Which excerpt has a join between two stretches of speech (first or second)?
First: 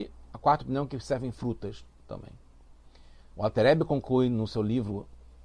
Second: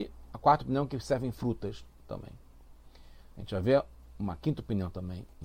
first